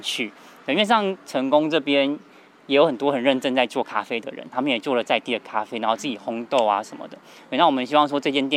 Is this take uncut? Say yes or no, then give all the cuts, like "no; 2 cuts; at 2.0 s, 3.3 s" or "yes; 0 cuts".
yes; 0 cuts